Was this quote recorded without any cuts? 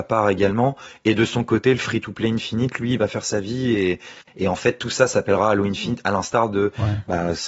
yes; 0 cuts

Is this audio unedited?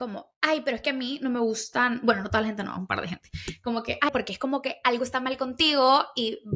no; 1 cut; at 4.1 s

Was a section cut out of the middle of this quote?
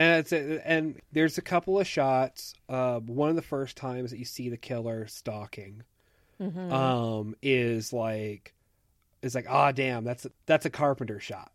no; 0 cuts

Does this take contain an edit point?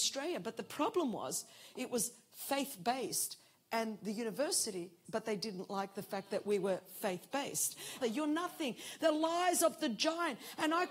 yes; 2 cuts; at 5.1 s, 8.0 s

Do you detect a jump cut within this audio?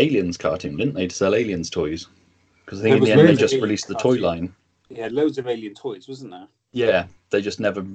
no; 0 cuts

